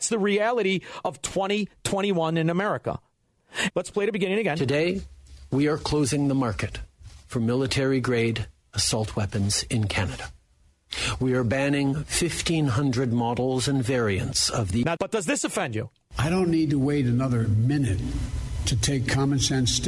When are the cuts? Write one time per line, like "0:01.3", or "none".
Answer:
0:03.7
0:15.0
0:18.6